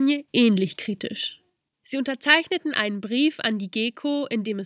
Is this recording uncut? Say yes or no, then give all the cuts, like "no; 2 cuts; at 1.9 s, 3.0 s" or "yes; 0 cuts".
no; 1 cut; at 1.7 s